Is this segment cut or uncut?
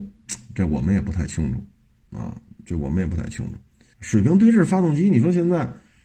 cut